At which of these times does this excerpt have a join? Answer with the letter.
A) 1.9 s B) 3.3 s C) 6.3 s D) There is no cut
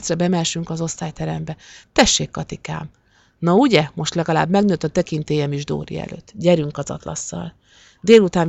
D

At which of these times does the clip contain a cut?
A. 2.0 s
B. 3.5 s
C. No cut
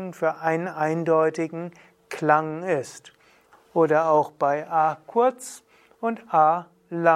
B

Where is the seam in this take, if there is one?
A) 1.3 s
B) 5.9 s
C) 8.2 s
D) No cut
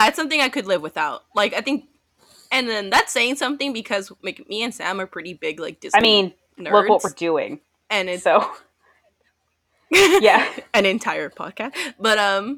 D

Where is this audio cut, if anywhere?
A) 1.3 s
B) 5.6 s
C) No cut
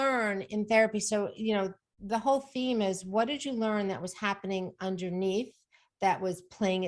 C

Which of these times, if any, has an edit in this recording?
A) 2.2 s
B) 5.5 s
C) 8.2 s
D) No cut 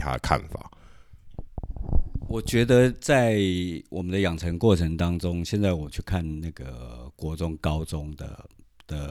D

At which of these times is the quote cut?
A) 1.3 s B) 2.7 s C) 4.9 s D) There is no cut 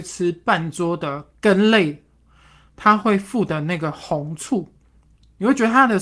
D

